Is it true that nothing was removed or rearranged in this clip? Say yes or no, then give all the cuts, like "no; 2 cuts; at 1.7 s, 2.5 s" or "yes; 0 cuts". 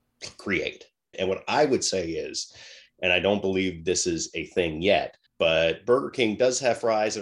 no; 2 cuts; at 1.1 s, 5.3 s